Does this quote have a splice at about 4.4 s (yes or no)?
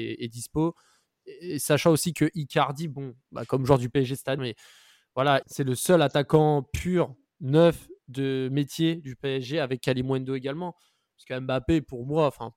yes